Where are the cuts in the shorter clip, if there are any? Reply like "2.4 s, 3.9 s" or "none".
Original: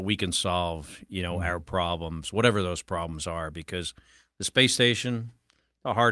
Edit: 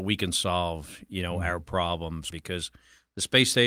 2.3 s